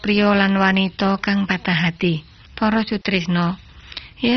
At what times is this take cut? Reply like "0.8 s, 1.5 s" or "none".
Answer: 2.5 s